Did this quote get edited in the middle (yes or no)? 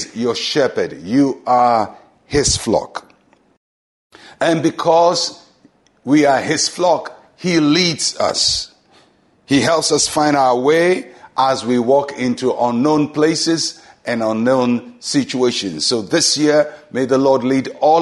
no